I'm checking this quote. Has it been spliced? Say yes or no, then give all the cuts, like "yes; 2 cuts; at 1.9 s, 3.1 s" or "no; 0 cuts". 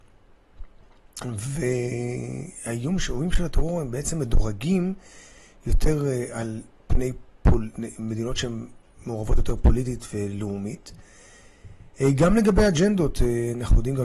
no; 0 cuts